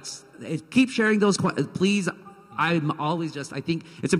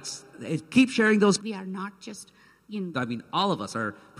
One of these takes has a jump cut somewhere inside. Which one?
second; 2 cuts; at 1.4 s, 2.9 s

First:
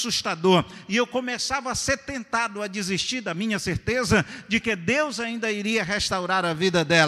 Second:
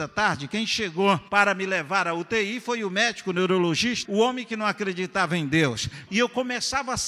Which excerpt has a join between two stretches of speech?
second; 3 cuts; at 1.3 s, 4.0 s, 6.1 s

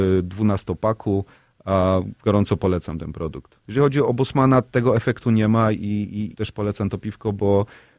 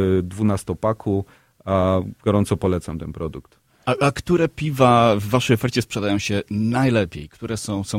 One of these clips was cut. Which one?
first; 2 cuts; at 3.6 s, 6.3 s

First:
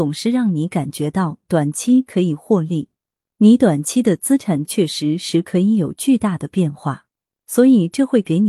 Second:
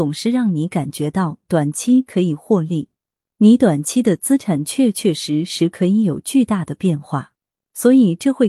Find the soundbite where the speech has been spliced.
first; 1 cut; at 4.6 s

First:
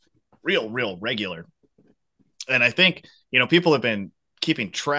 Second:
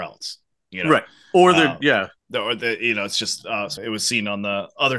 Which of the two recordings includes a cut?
second; 2 cuts; at 2.2 s, 3.8 s

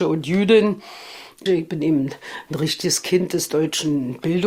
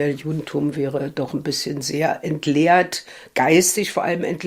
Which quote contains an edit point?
first; 1 cut; at 1.5 s

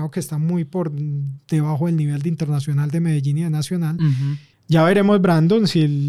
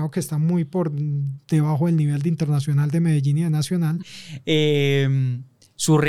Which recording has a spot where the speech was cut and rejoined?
second; 1 cut; at 4.0 s

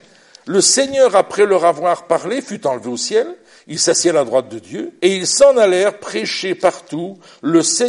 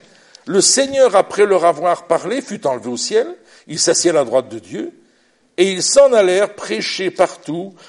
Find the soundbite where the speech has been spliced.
first; 1 cut; at 5.0 s

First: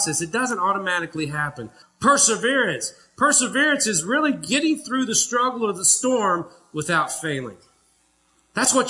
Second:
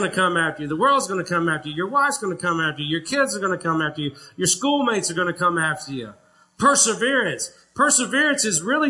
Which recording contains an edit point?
first; 1 cut; at 1.8 s

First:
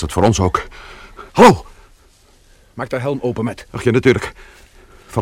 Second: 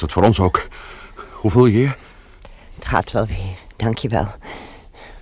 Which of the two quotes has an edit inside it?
first; 1 cut; at 1.3 s

